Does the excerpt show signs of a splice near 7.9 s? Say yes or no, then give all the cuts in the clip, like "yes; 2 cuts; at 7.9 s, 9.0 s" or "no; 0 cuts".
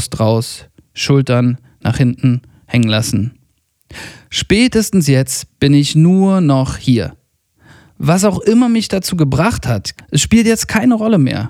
no; 1 cut; at 10.0 s